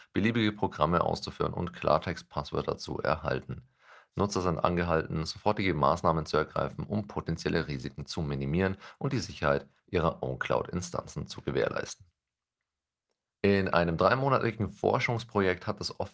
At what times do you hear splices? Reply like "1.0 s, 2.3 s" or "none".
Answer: 13.3 s